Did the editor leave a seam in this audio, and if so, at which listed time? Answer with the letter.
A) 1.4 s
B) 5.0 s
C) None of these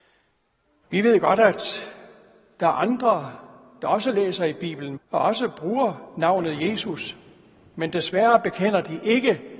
B